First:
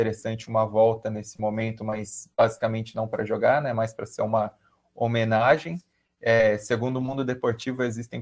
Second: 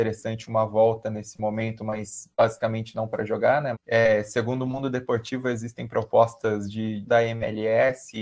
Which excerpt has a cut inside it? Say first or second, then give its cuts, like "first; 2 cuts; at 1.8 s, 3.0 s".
second; 2 cuts; at 3.7 s, 7.1 s